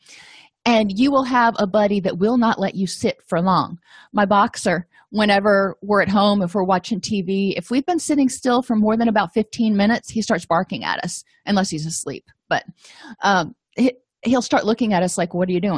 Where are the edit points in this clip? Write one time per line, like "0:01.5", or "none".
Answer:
none